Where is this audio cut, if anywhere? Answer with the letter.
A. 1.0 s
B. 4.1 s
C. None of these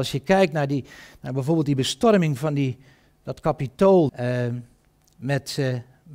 B